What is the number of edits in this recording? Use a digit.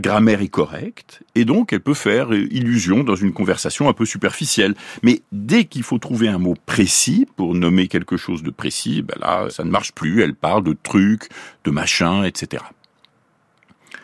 0